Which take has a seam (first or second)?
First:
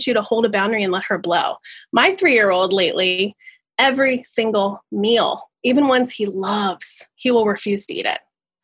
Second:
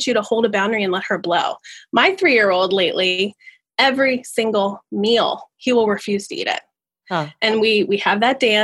second